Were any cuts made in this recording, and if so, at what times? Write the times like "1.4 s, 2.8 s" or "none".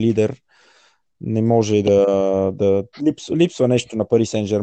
2.9 s